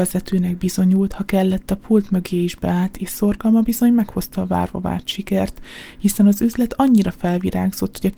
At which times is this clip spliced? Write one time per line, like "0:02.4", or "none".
none